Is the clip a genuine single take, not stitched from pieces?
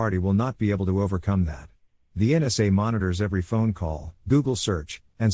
no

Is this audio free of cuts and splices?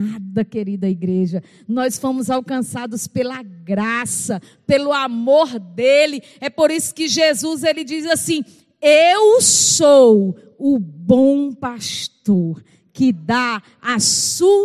yes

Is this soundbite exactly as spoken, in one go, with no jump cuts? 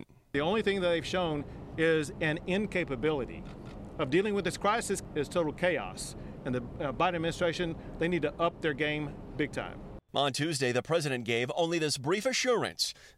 yes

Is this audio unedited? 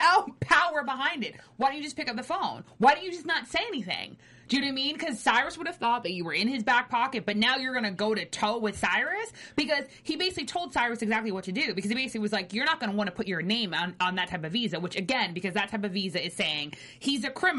yes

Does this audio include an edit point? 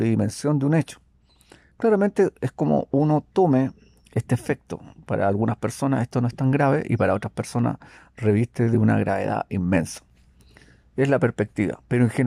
no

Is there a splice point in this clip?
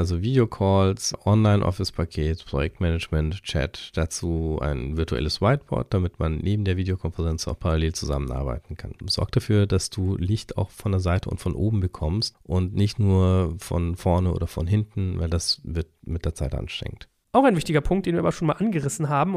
yes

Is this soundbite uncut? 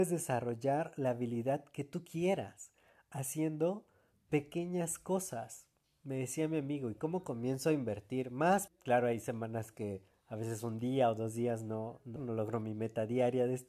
no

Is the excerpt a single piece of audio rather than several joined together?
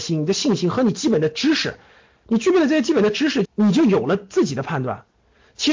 no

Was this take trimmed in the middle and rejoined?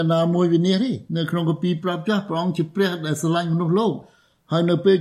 yes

